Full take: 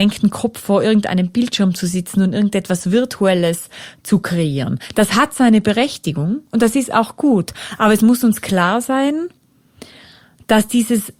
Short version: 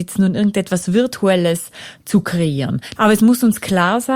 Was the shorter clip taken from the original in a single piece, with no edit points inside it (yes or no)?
no